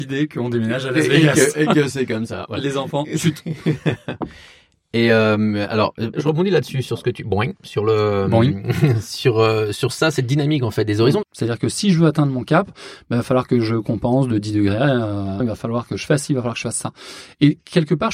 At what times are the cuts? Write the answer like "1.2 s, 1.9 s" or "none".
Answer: 6.1 s, 11.2 s, 15.4 s